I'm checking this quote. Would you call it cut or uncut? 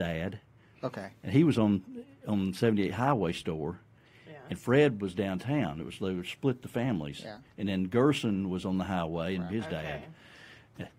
cut